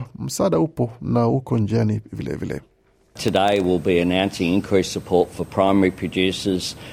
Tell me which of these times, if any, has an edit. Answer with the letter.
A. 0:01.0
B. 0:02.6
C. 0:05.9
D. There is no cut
D